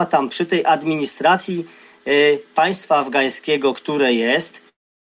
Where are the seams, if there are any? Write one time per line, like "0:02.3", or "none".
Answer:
none